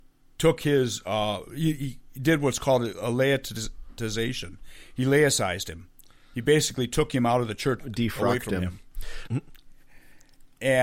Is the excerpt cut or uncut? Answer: cut